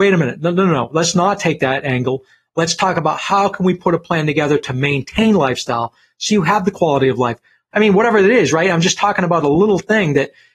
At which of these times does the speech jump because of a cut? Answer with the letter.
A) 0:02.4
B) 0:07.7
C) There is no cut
B